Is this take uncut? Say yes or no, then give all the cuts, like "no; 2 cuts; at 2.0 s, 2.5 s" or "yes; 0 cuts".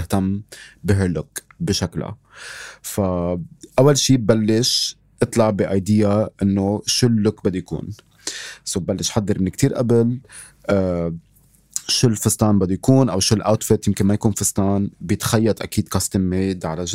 yes; 0 cuts